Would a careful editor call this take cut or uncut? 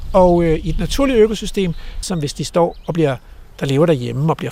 cut